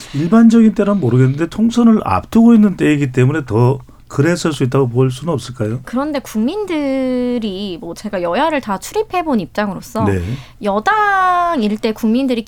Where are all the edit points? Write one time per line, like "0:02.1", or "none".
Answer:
0:05.8